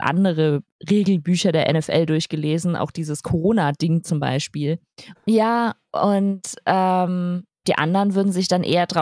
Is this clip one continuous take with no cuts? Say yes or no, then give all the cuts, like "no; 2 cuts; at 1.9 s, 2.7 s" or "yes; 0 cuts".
no; 2 cuts; at 5.1 s, 7.6 s